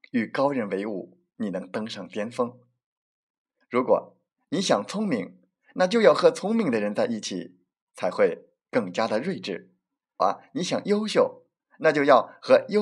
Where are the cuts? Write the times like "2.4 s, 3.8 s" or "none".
3.6 s, 10.2 s